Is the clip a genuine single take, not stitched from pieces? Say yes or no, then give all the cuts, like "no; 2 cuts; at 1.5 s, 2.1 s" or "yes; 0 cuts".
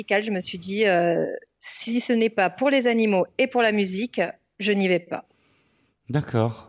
yes; 0 cuts